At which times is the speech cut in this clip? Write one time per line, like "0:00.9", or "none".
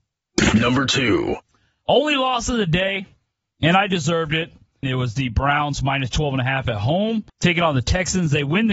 0:04.8
0:07.3

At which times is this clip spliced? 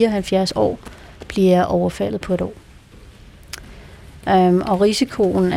none

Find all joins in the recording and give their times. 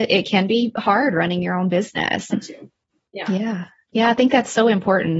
0:02.3

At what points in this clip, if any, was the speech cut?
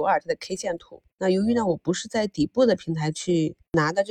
none

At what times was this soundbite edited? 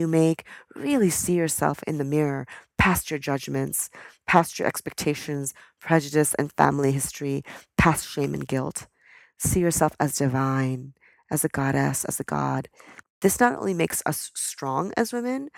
0:13.0

